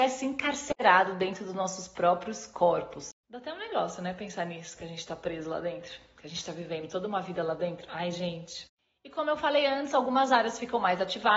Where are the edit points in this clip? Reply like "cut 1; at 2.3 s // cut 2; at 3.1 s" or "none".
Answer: none

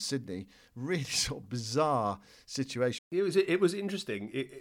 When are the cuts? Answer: cut 1; at 3.0 s

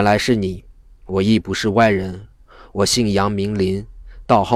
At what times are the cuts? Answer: none

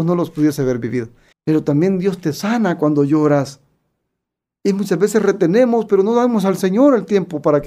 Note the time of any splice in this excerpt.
cut 1; at 1.3 s

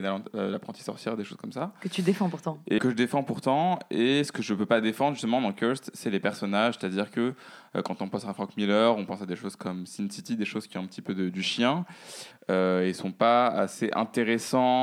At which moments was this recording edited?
cut 1; at 2.8 s // cut 2; at 12.3 s

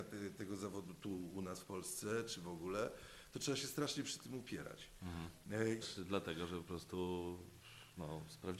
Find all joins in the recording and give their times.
cut 1; at 5.8 s

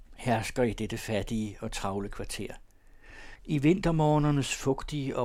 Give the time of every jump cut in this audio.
cut 1; at 3.4 s

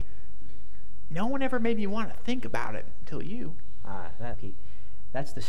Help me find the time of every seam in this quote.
cut 1; at 4.3 s

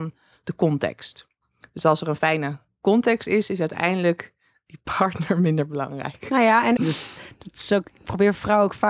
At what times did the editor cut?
cut 1; at 6.8 s

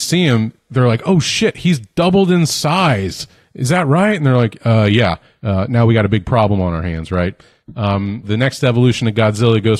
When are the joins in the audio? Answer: cut 1; at 5.7 s // cut 2; at 8.2 s

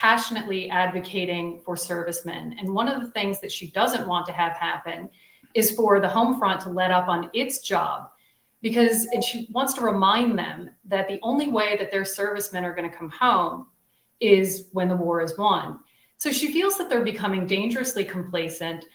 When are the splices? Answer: none

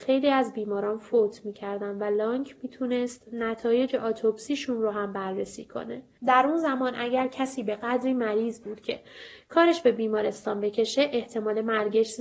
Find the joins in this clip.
cut 1; at 6.2 s

